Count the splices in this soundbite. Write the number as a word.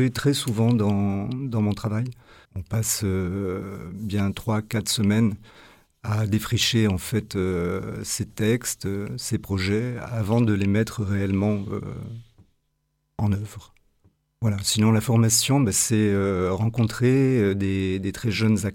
one